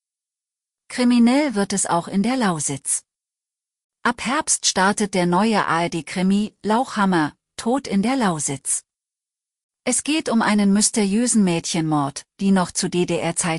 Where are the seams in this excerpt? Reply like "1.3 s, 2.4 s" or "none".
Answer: 3.9 s, 12.3 s

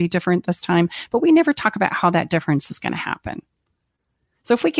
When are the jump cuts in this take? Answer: none

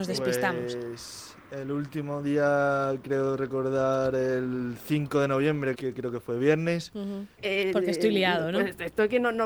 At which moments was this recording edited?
5.7 s, 7.4 s

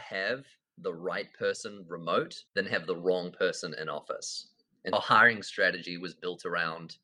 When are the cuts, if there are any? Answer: 2.5 s, 4.9 s

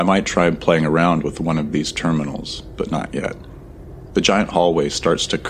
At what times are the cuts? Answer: 4.1 s

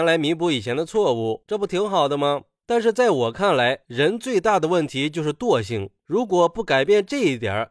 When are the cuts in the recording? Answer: 2.6 s

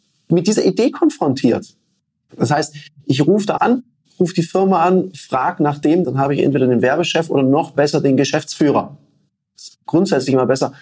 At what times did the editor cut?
3.6 s, 6.0 s

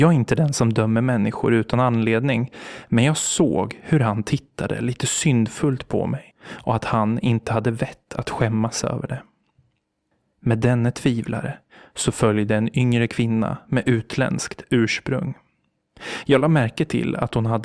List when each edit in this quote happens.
none

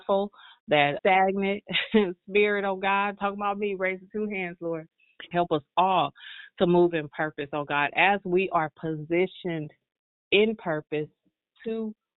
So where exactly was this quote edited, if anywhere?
1.0 s, 5.3 s

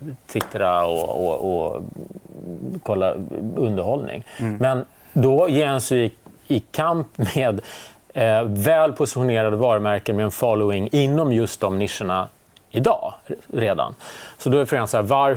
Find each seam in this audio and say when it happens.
none

